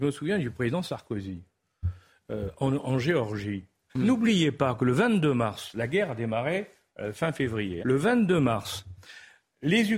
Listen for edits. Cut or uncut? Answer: cut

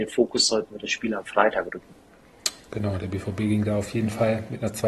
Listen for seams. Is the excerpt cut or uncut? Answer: uncut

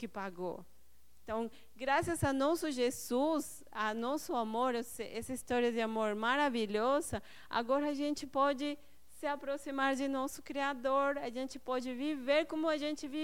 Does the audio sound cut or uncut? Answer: uncut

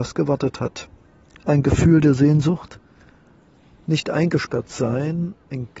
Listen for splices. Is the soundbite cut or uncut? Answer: uncut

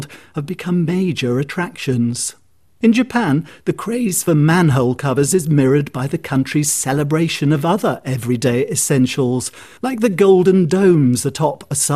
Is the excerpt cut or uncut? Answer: uncut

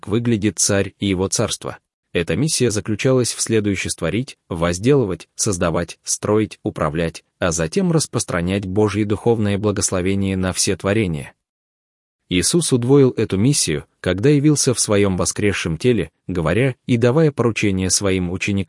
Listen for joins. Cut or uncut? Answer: cut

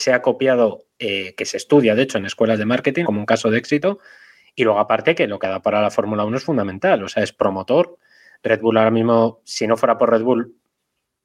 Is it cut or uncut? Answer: cut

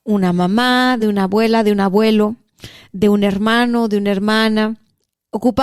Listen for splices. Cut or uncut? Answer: cut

